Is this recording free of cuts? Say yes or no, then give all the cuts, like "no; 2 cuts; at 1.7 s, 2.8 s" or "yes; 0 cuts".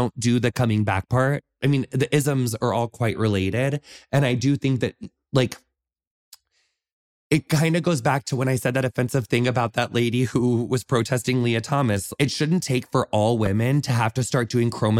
yes; 0 cuts